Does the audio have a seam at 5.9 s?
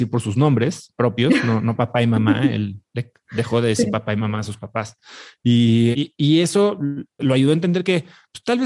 yes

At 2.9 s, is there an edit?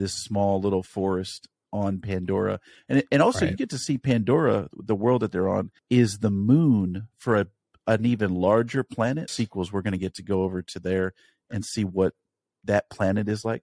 no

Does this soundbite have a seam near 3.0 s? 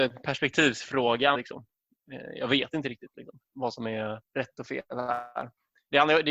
no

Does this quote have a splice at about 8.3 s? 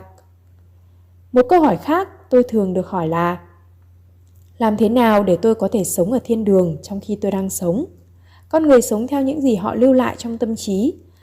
no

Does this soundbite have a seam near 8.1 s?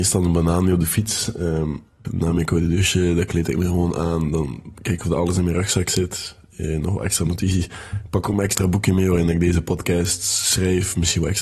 no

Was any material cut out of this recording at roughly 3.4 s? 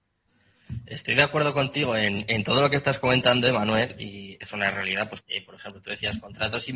no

